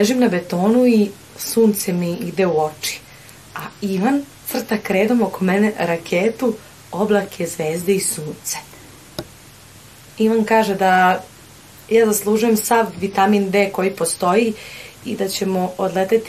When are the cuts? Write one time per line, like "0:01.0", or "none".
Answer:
0:04.3